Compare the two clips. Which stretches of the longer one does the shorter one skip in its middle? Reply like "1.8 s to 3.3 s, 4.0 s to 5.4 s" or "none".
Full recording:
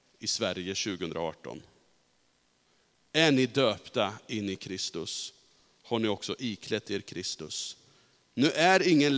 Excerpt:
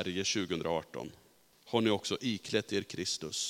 2.0 s to 5.7 s